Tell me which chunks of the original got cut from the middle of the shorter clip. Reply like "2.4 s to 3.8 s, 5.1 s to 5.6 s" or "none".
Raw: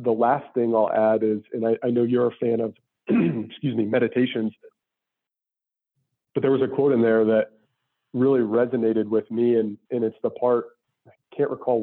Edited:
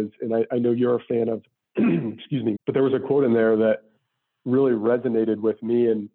3.9 s to 6.2 s

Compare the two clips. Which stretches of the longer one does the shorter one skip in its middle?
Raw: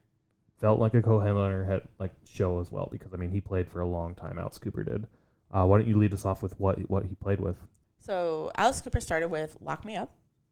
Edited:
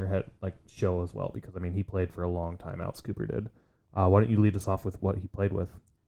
6.6 s to 6.9 s

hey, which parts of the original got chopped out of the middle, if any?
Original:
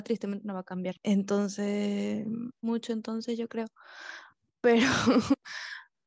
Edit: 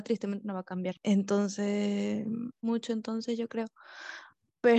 none

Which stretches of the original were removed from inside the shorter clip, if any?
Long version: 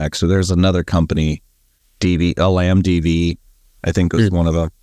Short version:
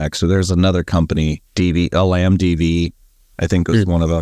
1.5 s to 1.9 s

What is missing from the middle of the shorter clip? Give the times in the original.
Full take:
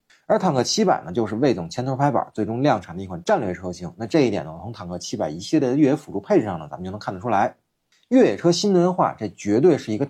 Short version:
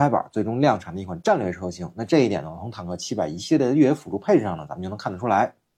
none

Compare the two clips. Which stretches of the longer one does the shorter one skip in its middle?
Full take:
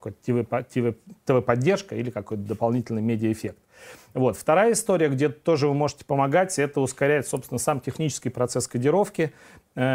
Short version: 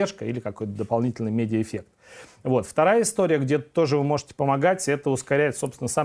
none

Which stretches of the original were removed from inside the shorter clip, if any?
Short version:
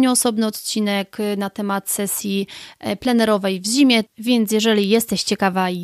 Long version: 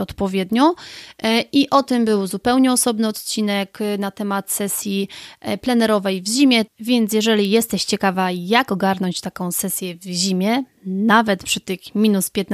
none

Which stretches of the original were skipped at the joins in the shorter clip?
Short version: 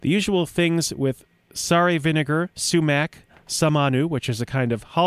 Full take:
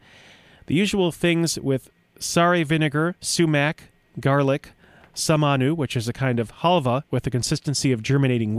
3.9 s to 5.0 s

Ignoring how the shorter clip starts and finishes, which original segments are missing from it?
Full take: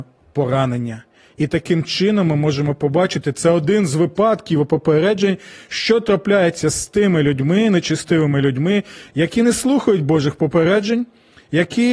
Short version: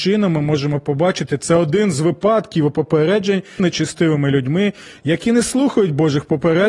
5.5 s to 7.7 s

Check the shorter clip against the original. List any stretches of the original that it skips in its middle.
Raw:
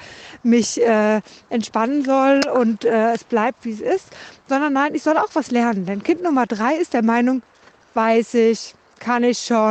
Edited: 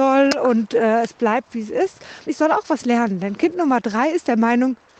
4.4 s to 4.9 s

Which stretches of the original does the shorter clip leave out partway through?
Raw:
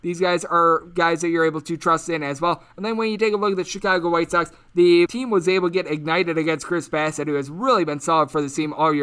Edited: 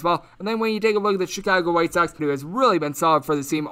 4.6 s to 7.2 s

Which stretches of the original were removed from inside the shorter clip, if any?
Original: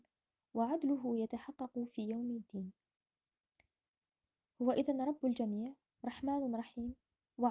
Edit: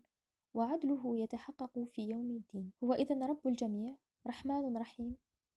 2.7 s to 4.5 s

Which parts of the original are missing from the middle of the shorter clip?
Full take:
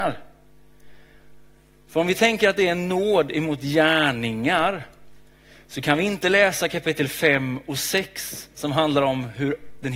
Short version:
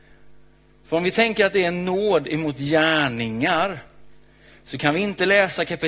none

